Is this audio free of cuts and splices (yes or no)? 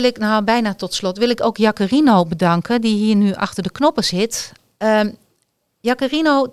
yes